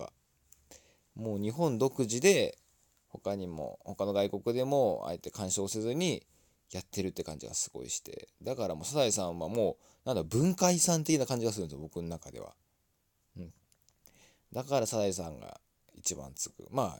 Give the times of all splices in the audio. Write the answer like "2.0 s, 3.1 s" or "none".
none